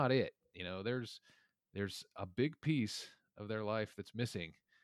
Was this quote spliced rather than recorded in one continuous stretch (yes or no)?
no